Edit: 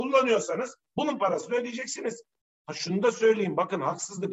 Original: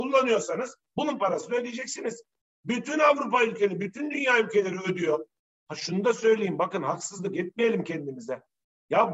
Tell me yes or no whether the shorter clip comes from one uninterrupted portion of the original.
no